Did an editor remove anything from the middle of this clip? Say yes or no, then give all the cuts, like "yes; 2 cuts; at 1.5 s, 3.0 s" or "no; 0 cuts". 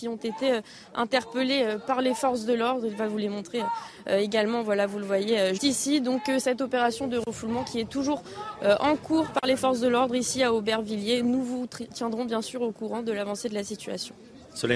yes; 1 cut; at 5.6 s